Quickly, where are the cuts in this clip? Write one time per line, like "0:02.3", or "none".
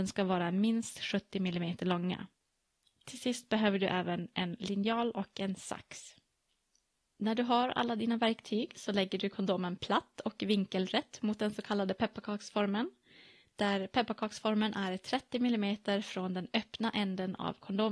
none